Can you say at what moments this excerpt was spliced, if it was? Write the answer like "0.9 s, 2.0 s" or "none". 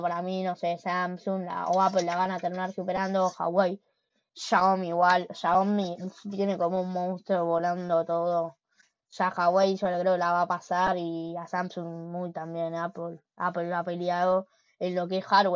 none